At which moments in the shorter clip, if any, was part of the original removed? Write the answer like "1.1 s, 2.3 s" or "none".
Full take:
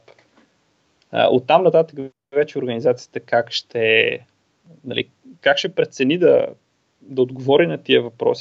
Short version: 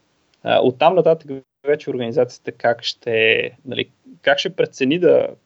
3.6 s